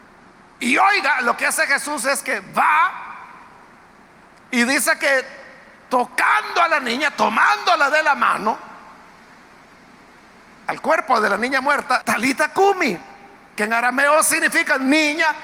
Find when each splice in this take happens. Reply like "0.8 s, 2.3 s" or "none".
12.0 s